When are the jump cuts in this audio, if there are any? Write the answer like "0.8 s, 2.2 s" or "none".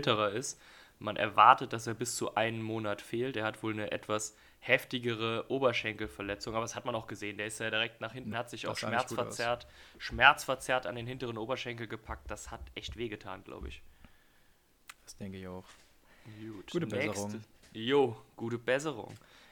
8.3 s, 15.0 s